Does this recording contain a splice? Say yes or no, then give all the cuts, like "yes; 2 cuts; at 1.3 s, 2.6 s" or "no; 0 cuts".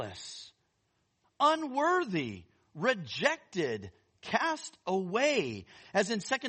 yes; 1 cut; at 1.2 s